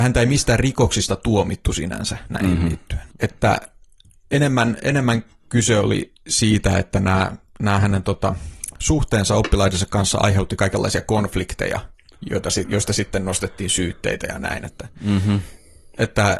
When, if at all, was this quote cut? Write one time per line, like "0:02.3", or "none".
0:03.1